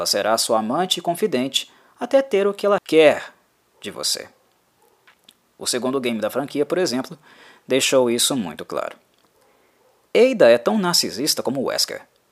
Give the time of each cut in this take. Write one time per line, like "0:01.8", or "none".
0:02.8

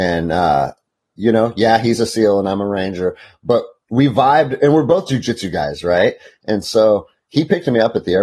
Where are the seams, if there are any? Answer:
none

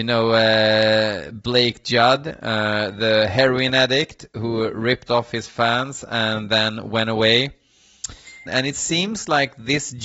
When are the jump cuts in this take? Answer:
0:08.5

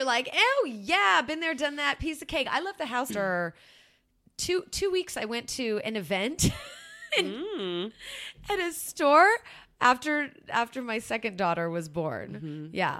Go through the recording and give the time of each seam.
0:03.1

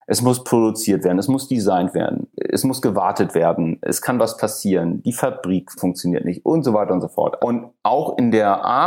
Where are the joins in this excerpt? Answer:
0:07.4

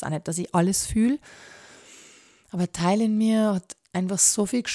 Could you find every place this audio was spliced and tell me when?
none

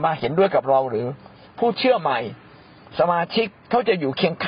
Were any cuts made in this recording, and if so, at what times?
0:03.6

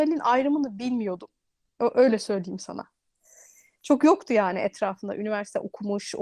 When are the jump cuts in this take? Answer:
none

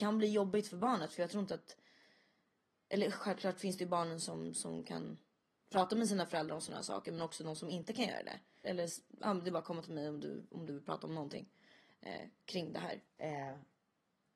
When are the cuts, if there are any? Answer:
0:08.6
0:13.1

